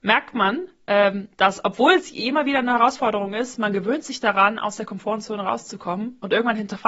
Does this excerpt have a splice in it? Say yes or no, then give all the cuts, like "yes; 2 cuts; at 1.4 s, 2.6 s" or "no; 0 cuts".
yes; 1 cut; at 1.3 s